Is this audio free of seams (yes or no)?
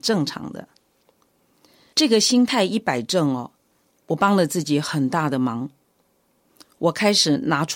no